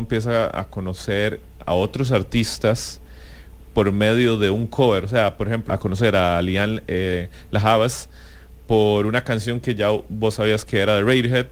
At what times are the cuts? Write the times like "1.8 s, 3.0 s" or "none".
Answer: 1.6 s, 5.7 s